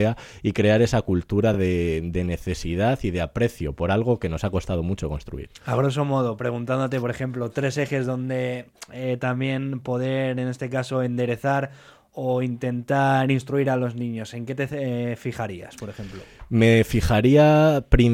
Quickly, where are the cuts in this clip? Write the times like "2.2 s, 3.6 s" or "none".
none